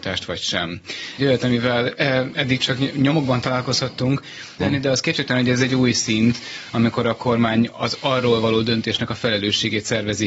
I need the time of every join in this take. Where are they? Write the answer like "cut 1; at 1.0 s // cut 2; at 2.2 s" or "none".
cut 1; at 1.2 s // cut 2; at 4.6 s